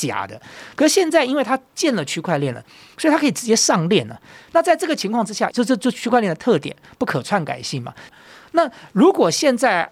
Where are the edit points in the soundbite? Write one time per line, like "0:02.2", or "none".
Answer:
0:05.5
0:08.1